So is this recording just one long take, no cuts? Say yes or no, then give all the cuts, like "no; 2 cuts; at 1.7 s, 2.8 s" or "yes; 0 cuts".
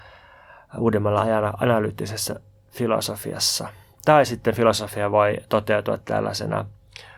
yes; 0 cuts